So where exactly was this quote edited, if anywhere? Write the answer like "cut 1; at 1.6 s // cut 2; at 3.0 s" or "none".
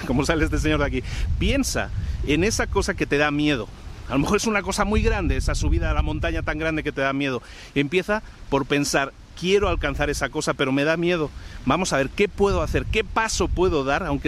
none